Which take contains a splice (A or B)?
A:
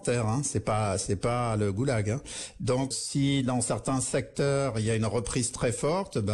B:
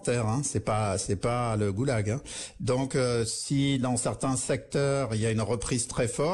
A